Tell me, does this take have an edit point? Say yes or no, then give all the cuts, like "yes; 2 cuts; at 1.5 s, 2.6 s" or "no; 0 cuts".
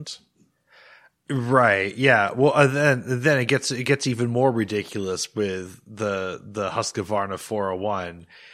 no; 0 cuts